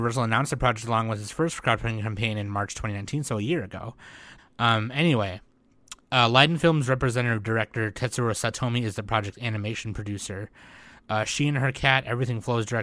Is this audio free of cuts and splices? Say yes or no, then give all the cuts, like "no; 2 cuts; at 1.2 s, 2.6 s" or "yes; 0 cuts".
no; 1 cut; at 4.4 s